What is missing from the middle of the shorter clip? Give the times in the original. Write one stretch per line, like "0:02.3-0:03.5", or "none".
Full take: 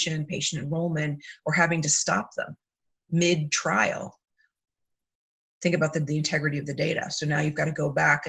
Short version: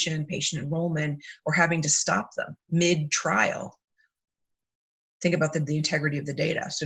0:02.6-0:03.0